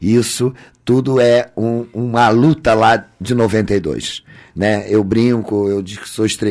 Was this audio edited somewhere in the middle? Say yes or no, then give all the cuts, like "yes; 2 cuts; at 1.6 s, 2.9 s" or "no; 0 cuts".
no; 0 cuts